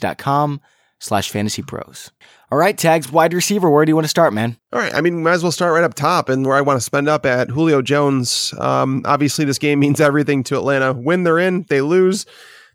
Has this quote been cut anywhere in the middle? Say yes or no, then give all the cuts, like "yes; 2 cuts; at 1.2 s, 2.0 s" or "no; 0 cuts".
no; 0 cuts